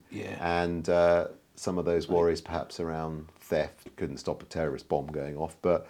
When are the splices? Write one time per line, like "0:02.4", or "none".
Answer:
0:03.9